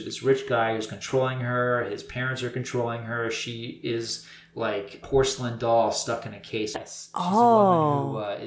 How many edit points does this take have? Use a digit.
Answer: 2